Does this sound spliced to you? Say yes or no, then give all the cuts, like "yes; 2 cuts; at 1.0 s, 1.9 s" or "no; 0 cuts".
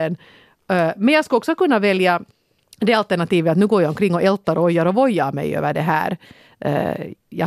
no; 0 cuts